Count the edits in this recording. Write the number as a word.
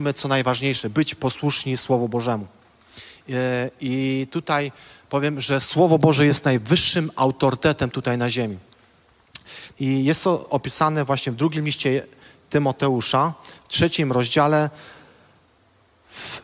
one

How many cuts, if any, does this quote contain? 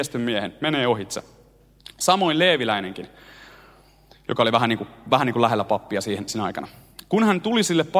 zero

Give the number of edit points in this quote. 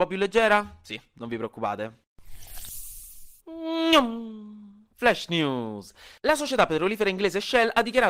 one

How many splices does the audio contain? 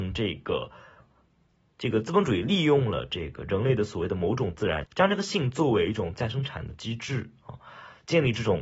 two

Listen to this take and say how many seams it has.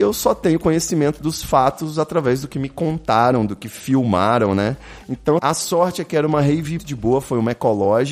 two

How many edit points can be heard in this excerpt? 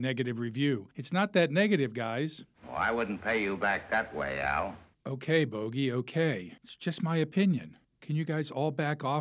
zero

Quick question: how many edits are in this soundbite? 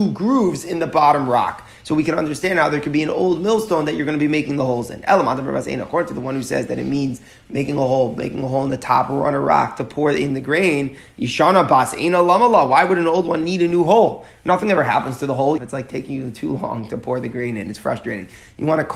one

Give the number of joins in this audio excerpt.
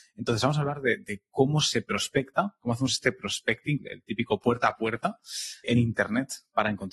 two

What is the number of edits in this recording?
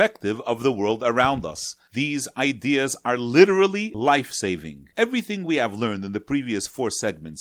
one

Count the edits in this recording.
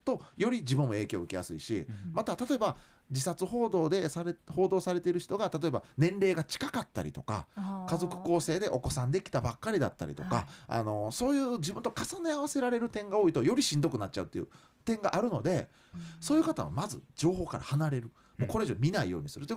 one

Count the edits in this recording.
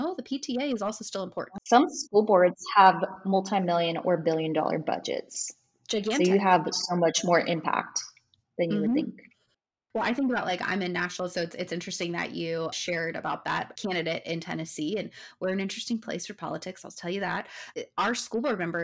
zero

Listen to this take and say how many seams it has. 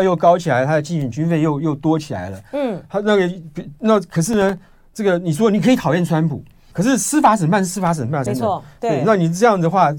two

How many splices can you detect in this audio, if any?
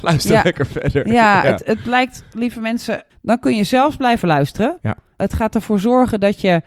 two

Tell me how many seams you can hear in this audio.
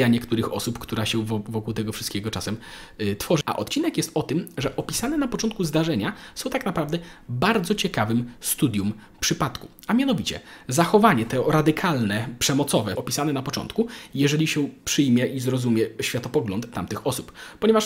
three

